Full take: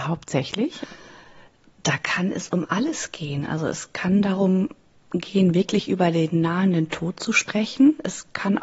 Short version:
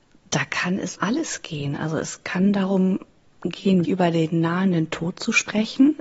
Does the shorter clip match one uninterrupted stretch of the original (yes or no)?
no